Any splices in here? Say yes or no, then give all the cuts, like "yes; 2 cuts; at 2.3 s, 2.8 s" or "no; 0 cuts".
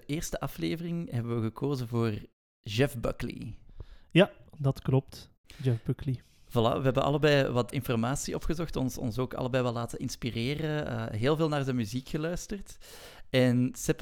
no; 0 cuts